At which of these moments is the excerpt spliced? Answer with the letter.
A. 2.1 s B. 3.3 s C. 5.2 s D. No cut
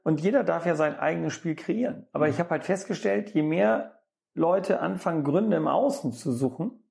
D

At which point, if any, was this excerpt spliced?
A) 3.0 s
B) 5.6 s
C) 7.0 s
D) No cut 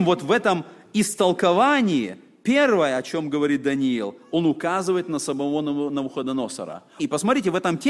C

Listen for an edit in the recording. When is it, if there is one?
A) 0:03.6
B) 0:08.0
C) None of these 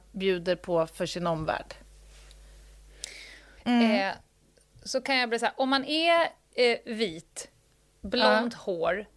A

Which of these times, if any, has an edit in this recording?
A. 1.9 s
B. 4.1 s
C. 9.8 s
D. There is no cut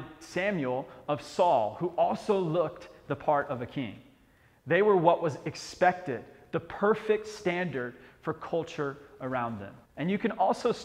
C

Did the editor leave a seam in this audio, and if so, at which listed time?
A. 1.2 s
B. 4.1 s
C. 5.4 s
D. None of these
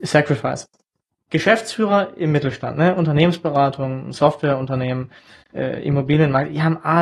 D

